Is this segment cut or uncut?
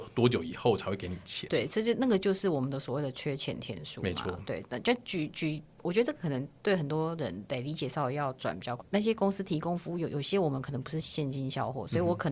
cut